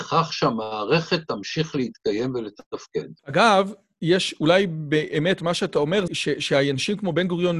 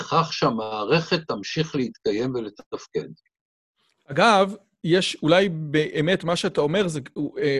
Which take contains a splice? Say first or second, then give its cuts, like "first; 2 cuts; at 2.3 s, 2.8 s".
first; 2 cuts; at 3.2 s, 6.1 s